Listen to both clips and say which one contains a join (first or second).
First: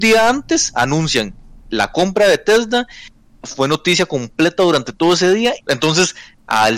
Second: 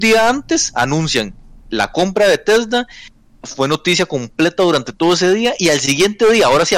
first